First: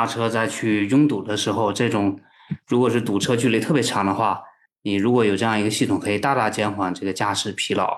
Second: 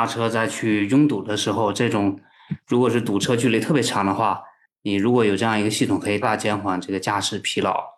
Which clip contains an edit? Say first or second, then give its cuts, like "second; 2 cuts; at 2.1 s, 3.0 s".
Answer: second; 1 cut; at 6.2 s